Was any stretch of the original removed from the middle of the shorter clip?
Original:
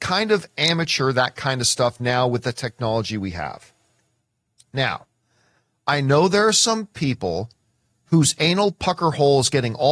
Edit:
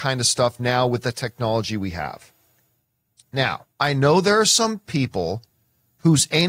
yes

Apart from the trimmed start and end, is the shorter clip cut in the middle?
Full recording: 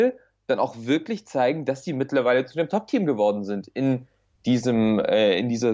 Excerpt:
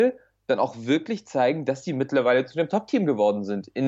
no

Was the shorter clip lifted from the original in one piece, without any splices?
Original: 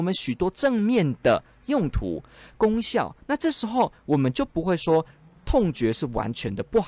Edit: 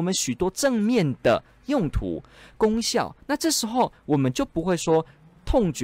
yes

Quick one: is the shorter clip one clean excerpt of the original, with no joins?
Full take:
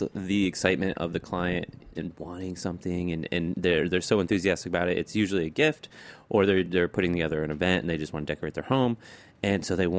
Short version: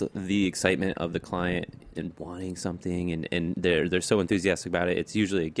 yes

